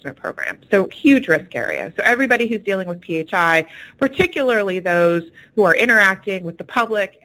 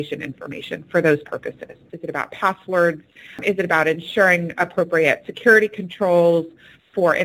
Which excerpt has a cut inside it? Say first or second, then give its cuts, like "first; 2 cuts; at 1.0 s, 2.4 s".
second; 1 cut; at 1.9 s